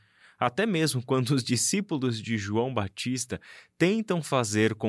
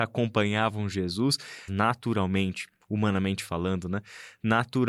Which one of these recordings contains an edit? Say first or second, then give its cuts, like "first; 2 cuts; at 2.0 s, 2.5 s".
second; 1 cut; at 1.7 s